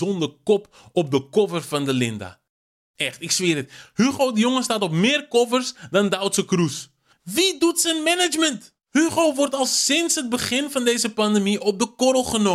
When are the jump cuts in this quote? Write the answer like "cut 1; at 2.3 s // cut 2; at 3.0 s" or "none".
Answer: cut 1; at 7.1 s